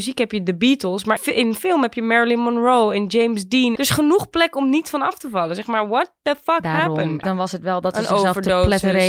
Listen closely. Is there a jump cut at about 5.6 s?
no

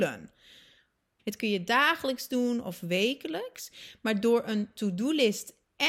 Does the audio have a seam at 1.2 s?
yes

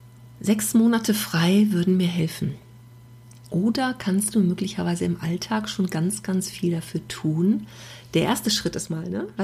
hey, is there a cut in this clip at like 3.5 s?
yes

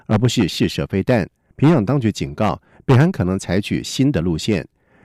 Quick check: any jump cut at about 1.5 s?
yes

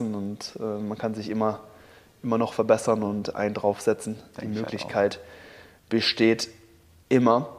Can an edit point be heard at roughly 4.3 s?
no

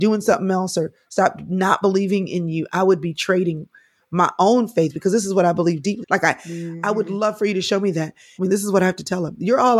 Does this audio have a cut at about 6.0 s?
yes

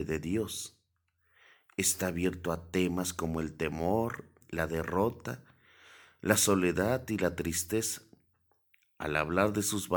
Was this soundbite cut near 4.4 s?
yes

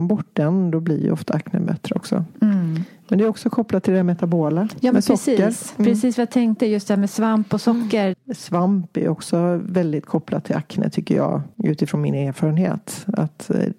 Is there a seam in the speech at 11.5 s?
yes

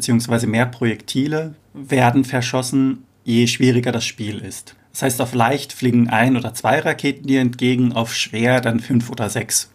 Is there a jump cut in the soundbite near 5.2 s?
no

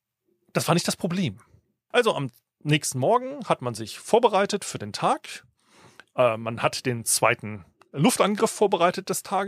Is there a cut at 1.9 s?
yes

